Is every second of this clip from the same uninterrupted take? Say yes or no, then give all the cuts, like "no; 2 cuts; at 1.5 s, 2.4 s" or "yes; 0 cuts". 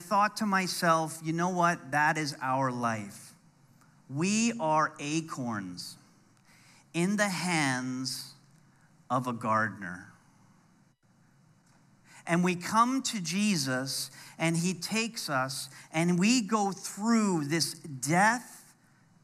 yes; 0 cuts